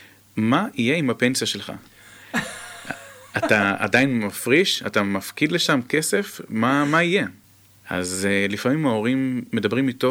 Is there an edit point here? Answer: no; 0 cuts

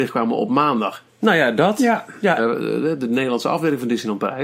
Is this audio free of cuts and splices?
no; 2 cuts; at 1.1 s, 2.4 s

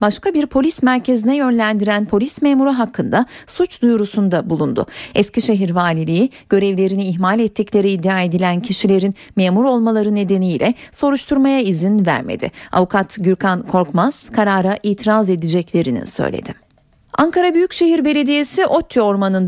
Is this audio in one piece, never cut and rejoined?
yes; 0 cuts

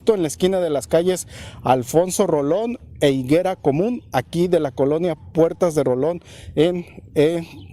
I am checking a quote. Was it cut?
no; 0 cuts

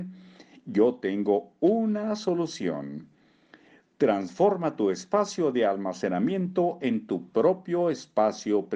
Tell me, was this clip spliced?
no; 0 cuts

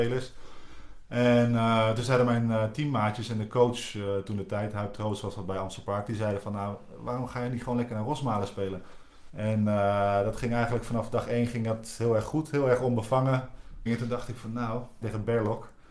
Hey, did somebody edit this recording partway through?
yes; 3 cuts; at 9.3 s, 13.9 s, 15.0 s

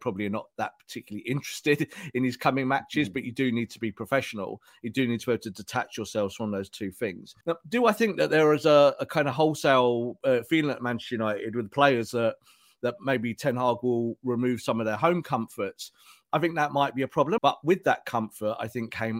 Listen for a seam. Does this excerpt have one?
yes; 2 cuts; at 7.4 s, 17.4 s

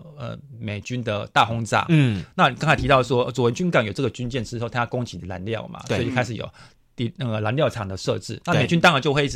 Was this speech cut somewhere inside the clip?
no; 0 cuts

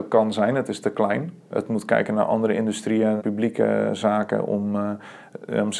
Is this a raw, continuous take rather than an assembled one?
no; 1 cut; at 3.2 s

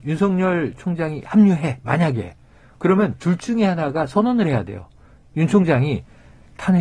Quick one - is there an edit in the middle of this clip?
no; 0 cuts

